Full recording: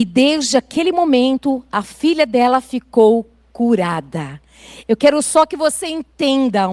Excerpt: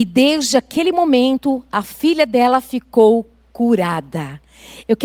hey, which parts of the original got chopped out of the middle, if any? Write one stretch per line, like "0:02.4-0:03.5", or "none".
none